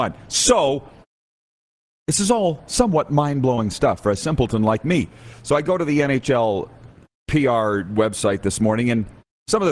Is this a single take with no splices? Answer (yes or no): yes